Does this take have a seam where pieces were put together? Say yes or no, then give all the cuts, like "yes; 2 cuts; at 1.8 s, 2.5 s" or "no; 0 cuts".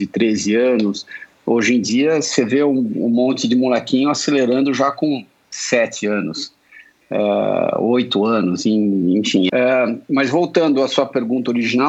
yes; 1 cut; at 9.5 s